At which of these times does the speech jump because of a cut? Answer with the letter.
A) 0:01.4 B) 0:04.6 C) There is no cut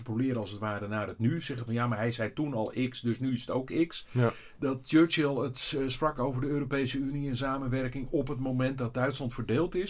C